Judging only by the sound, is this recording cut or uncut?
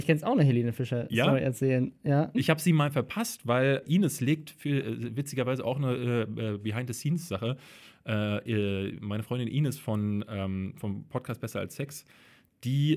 cut